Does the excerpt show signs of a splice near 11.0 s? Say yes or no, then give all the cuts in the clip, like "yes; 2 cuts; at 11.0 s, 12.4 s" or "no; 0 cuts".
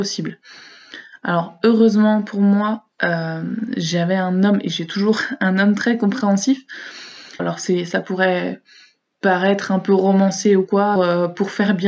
yes; 2 cuts; at 7.4 s, 11.0 s